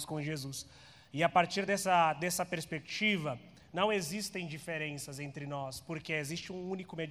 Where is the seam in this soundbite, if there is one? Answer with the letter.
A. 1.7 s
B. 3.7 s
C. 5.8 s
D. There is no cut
D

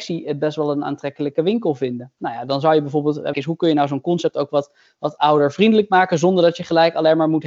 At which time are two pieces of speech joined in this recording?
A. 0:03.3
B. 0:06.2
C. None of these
A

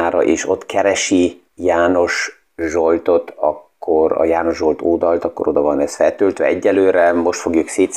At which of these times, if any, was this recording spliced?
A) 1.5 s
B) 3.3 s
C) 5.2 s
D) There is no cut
A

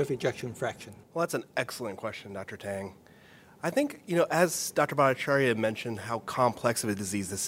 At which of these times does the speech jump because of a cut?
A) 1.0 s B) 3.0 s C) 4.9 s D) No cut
A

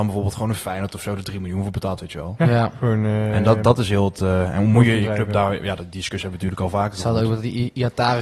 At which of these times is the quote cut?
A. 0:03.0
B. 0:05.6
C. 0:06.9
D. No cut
D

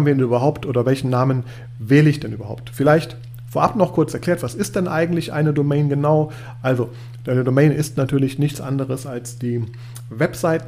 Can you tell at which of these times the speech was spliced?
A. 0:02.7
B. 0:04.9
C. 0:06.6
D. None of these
D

